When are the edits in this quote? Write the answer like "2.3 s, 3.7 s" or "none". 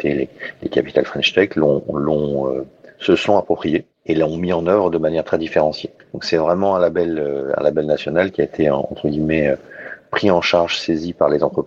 none